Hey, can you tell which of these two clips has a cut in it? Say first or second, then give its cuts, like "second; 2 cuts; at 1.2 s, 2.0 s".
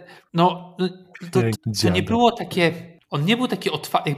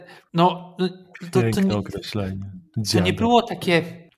first; 1 cut; at 1.5 s